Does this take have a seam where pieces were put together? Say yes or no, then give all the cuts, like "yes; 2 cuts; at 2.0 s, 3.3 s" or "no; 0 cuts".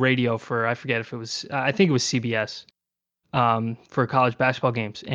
no; 0 cuts